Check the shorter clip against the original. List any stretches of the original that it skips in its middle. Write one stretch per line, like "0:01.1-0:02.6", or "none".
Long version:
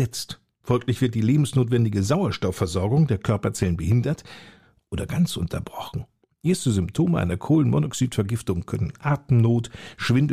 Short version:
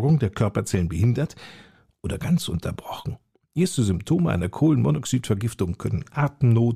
none

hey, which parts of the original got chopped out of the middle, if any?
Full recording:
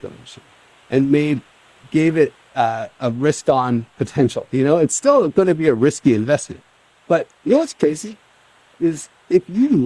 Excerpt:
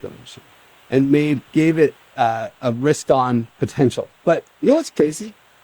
0:01.5-0:01.9
0:04.5-0:06.9

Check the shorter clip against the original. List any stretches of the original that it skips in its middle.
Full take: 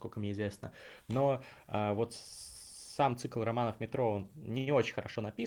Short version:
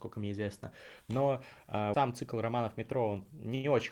0:01.9-0:03.0

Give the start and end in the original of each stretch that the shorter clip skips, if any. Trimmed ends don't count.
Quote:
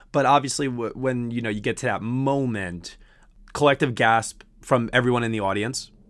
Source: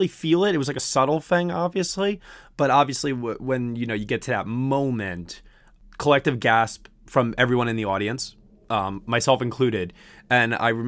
none

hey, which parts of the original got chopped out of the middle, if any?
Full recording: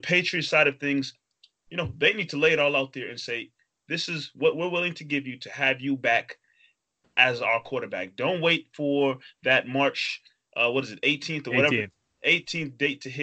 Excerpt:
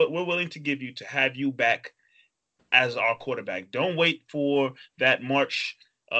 none

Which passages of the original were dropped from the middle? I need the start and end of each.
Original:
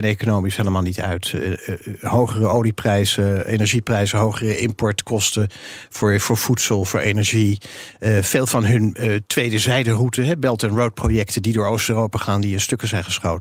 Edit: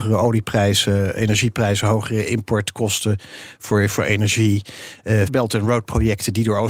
0:06.2-0:06.9
0:08.2-0:10.4

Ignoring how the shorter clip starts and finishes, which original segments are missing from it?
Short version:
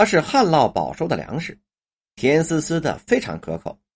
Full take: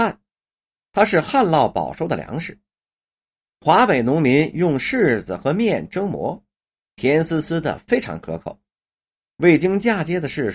0:03.0-0:06.8

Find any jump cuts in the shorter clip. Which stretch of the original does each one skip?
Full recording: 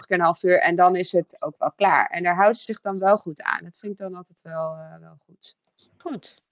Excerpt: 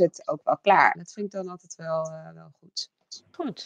0:02.1-0:03.6

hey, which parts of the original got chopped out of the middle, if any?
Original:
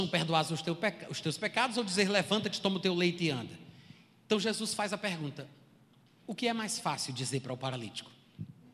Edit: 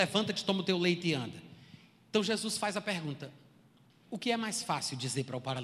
none

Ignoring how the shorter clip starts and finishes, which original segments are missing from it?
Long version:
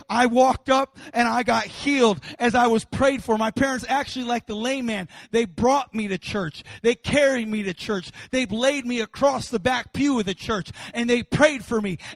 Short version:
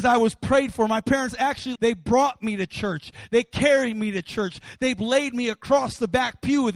0:04.2-0:05.3

